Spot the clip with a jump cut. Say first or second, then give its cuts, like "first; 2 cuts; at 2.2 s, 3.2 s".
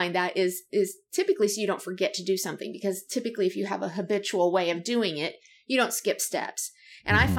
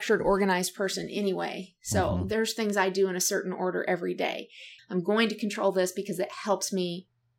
second; 1 cut; at 4.8 s